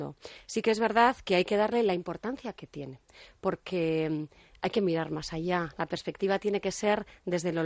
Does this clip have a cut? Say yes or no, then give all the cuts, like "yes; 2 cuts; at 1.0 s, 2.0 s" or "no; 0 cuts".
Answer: no; 0 cuts